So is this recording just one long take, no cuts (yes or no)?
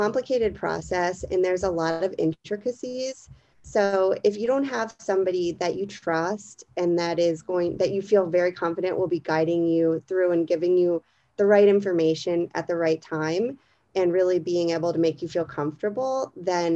yes